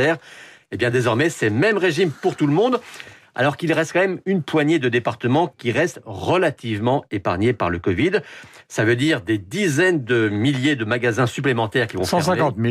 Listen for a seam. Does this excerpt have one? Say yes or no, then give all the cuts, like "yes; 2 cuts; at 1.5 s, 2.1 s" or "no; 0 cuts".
no; 0 cuts